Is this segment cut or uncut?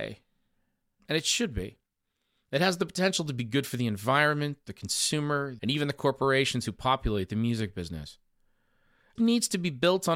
cut